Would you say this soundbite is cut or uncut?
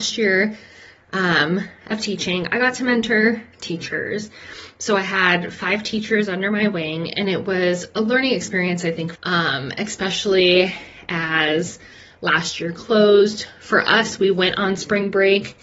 cut